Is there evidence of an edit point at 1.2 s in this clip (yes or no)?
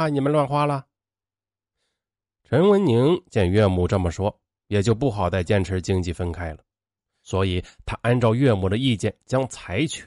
no